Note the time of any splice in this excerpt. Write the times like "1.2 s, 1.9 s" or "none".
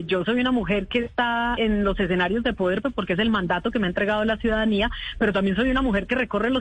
1.6 s, 2.8 s